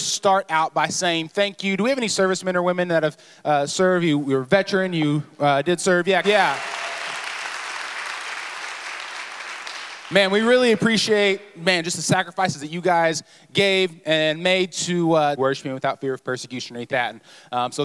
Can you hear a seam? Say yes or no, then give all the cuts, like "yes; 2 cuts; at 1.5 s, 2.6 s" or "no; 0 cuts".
yes; 3 cuts; at 6.2 s, 15.4 s, 16.9 s